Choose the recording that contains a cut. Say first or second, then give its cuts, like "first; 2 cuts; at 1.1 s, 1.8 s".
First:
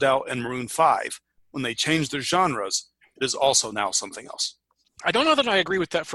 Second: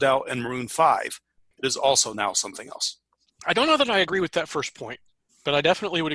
second; 1 cut; at 1.5 s